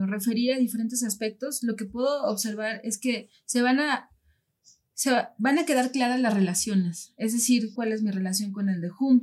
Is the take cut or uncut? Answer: cut